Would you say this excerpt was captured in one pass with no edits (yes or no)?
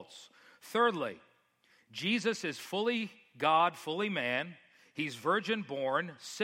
yes